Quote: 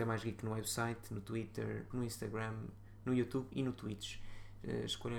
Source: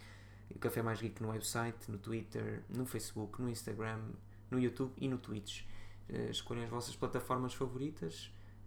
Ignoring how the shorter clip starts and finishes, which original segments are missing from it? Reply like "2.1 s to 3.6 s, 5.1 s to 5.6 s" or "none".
2.7 s to 3.4 s